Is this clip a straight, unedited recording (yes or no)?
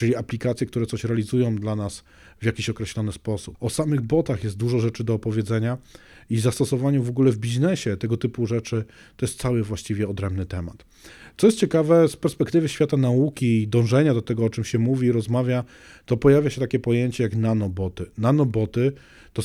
no